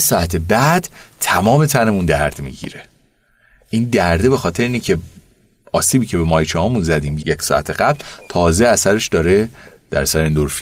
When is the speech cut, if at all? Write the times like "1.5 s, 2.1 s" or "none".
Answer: 7.2 s